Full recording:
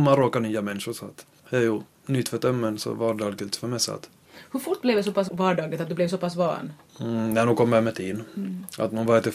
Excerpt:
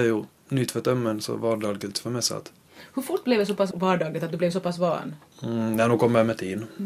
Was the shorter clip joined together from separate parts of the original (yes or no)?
no